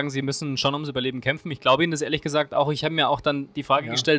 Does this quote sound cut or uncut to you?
uncut